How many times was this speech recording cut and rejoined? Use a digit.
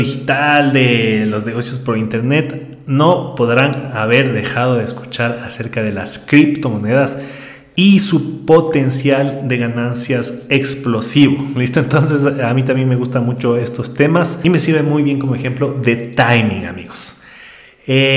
0